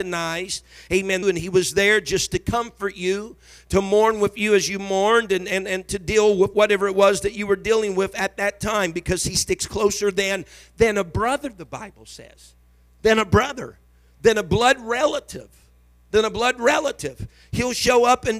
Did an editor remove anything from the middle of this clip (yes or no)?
yes